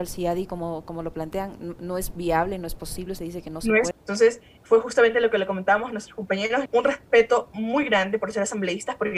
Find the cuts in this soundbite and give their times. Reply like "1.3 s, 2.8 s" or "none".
3.9 s, 6.7 s